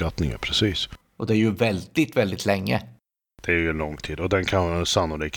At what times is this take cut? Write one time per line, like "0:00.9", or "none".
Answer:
none